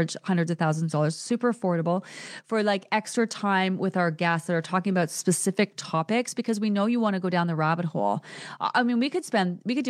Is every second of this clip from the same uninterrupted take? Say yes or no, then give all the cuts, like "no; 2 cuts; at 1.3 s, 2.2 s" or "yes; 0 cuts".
yes; 0 cuts